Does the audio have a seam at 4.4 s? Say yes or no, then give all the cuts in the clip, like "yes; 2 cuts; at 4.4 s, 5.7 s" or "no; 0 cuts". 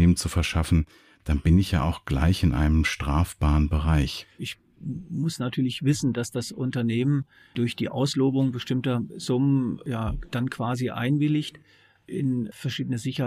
yes; 1 cut; at 4.4 s